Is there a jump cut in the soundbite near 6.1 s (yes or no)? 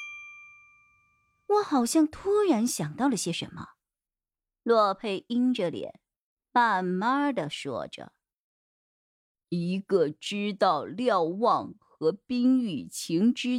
no